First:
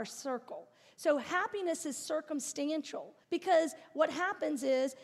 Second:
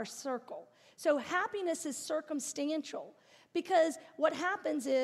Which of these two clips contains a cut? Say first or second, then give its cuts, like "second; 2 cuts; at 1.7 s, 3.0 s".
first; 1 cut; at 3.2 s